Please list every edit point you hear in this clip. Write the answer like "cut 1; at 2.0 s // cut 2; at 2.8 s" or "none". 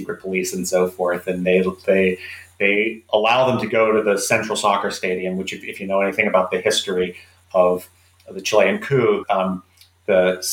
cut 1; at 9.2 s